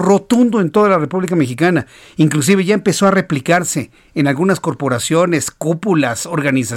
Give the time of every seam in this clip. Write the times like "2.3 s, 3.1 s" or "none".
none